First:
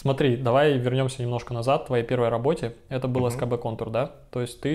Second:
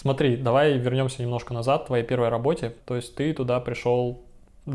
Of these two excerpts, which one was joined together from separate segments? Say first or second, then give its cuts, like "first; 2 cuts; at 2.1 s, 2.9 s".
second; 1 cut; at 2.8 s